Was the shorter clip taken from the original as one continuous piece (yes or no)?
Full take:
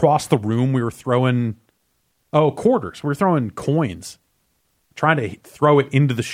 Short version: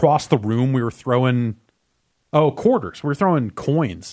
yes